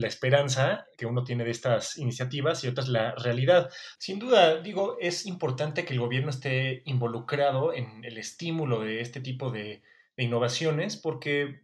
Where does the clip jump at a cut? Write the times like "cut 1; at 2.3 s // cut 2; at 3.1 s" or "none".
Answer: cut 1; at 4.0 s